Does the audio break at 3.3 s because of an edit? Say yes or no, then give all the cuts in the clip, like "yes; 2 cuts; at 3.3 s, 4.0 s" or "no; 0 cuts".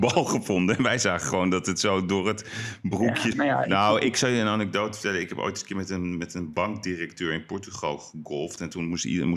yes; 1 cut; at 3.3 s